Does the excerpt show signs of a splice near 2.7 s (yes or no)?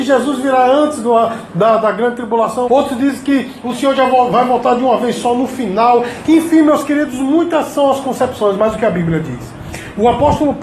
yes